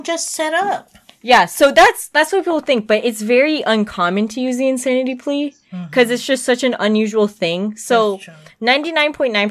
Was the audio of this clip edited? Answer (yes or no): no